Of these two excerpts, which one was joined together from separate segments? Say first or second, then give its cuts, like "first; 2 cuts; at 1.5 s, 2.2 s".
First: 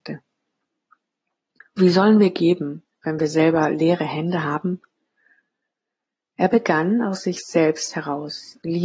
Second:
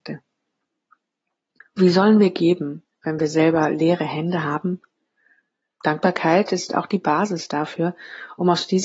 second; 1 cut; at 5.7 s